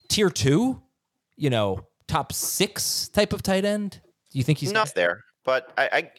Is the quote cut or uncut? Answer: cut